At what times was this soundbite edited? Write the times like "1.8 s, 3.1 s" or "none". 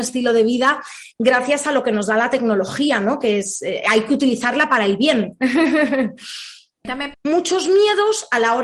7.1 s